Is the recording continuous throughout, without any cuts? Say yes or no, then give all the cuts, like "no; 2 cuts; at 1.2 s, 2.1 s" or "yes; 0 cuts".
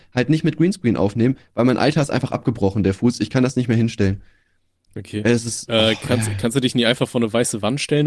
yes; 0 cuts